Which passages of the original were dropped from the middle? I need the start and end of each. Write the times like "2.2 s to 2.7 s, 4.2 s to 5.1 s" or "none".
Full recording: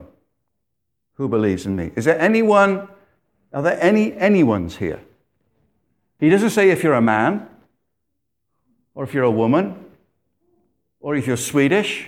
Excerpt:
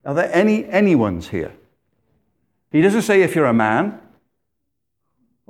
none